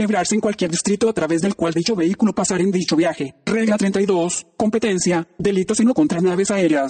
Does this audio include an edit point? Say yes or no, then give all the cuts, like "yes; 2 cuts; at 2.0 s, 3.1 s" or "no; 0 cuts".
no; 0 cuts